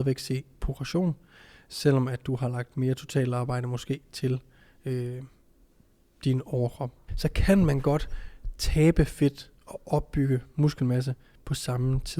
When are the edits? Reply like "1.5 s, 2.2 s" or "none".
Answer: 7.1 s

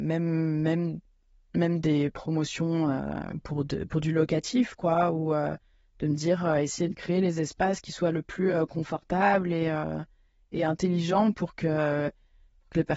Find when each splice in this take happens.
none

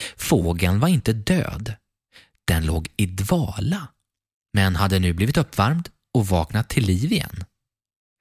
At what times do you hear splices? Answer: none

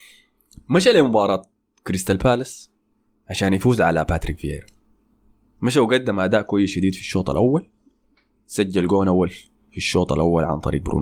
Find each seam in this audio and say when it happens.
none

